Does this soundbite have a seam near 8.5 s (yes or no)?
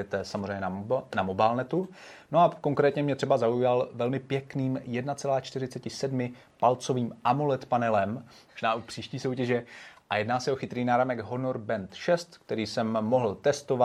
yes